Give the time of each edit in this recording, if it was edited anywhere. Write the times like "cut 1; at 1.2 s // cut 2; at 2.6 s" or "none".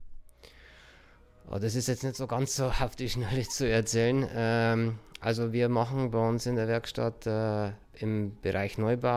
cut 1; at 7.8 s